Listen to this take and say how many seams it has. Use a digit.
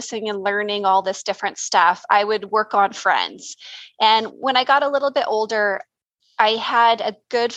0